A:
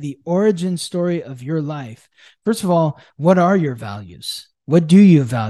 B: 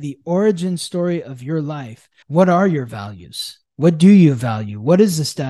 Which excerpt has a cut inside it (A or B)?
B